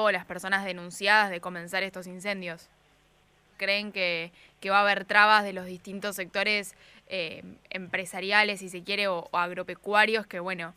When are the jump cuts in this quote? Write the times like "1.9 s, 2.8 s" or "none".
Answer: 3.5 s